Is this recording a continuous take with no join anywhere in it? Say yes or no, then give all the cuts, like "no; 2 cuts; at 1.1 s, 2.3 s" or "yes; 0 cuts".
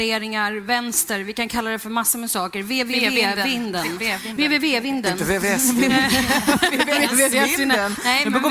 yes; 0 cuts